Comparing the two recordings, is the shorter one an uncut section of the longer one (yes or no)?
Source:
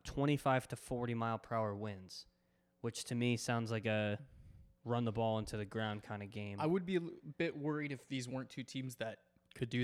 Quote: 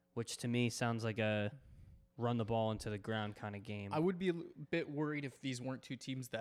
yes